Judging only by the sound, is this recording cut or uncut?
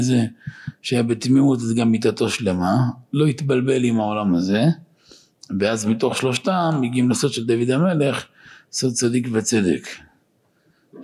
uncut